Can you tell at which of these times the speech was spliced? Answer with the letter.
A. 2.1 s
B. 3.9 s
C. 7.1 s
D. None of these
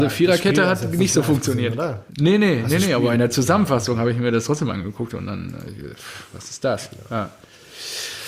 A